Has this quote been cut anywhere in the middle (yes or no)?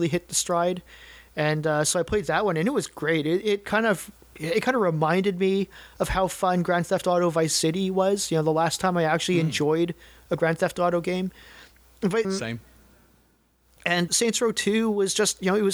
yes